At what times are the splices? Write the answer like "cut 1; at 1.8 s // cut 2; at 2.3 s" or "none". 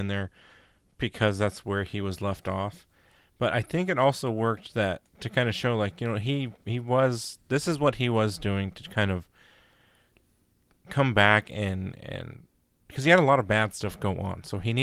cut 1; at 5.1 s

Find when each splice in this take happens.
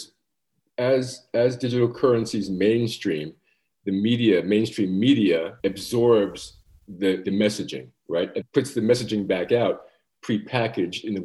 cut 1; at 5.6 s // cut 2; at 7.2 s // cut 3; at 8.4 s

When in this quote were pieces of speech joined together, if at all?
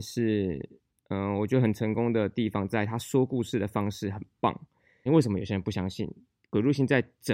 cut 1; at 5.1 s

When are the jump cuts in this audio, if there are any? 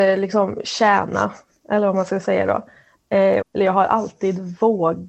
cut 1; at 3.4 s

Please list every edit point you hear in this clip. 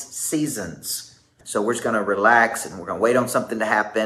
cut 1; at 1.4 s

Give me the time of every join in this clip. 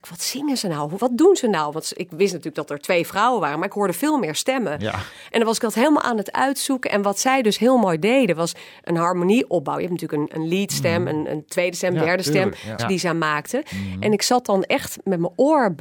cut 1; at 12.8 s

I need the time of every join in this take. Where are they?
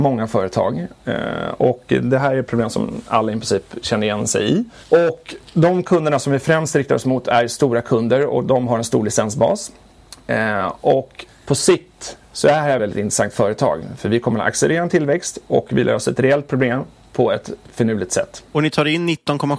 cut 1; at 12.8 s

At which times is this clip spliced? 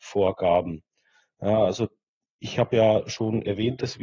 none

